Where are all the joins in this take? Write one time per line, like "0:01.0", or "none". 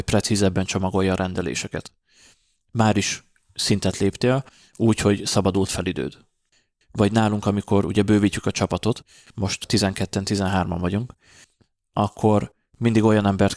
none